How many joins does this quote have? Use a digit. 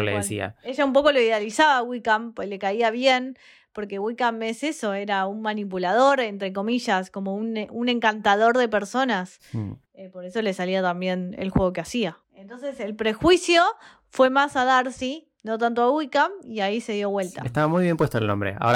0